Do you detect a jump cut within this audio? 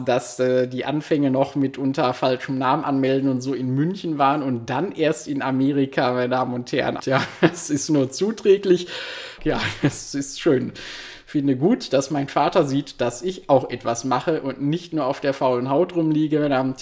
yes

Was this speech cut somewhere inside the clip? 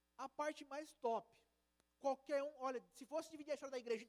no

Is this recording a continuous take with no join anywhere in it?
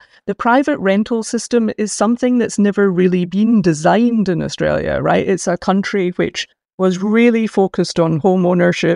yes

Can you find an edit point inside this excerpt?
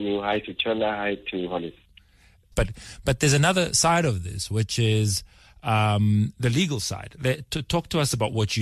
yes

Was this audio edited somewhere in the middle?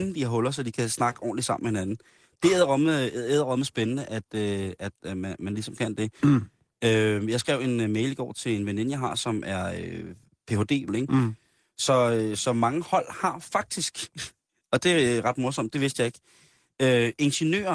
yes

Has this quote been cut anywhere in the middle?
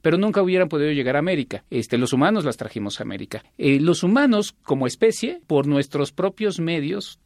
no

